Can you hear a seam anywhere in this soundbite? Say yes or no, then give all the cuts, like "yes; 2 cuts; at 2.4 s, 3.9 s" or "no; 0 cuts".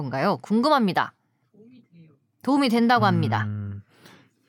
no; 0 cuts